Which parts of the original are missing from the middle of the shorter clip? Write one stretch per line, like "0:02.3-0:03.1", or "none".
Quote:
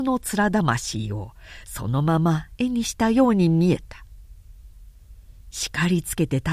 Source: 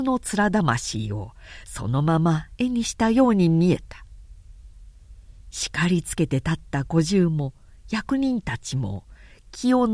none